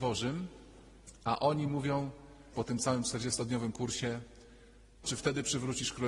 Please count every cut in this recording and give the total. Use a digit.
2